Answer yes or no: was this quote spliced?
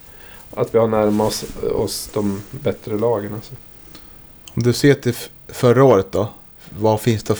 no